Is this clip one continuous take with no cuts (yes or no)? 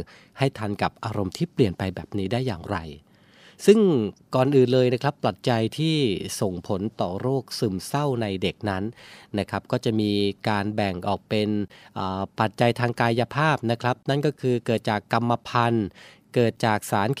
yes